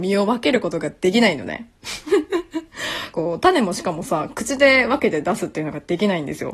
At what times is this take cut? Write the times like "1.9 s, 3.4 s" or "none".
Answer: 3.1 s